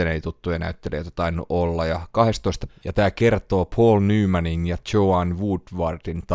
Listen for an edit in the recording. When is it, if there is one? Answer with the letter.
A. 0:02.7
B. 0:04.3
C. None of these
A